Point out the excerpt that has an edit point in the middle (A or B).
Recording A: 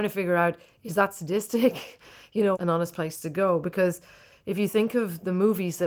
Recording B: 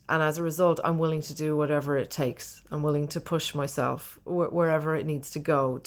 A